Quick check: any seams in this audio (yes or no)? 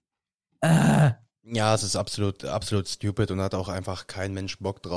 no